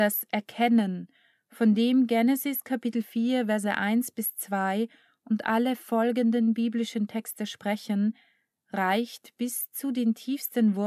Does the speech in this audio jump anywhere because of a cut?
no; 0 cuts

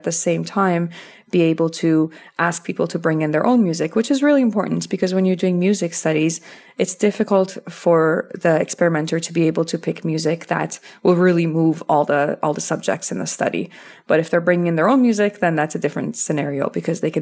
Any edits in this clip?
no; 0 cuts

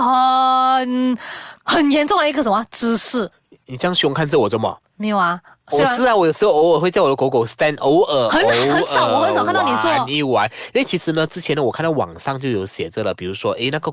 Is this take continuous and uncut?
yes; 0 cuts

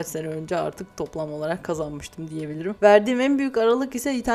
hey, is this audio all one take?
yes; 0 cuts

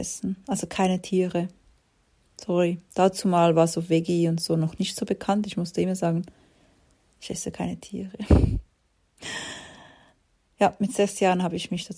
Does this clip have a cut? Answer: no; 0 cuts

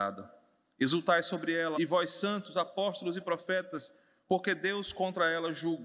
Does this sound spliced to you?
yes; 1 cut; at 1.7 s

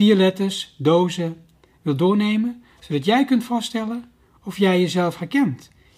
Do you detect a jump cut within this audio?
no; 0 cuts

